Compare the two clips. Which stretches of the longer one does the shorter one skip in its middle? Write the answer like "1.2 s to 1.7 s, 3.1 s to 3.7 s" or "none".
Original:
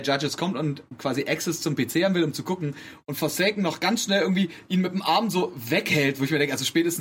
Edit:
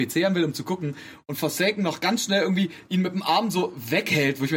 none